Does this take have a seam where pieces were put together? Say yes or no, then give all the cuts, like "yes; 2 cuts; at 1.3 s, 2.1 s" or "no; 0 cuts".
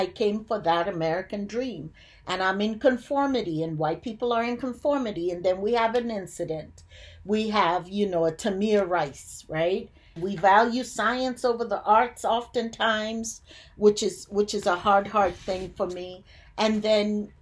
yes; 1 cut; at 10.2 s